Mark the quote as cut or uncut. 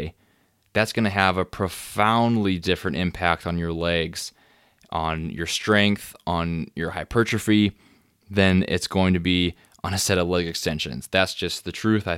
uncut